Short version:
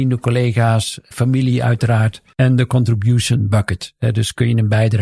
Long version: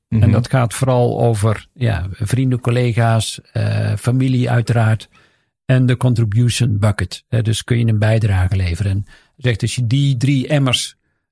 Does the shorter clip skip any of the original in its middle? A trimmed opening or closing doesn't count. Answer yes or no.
yes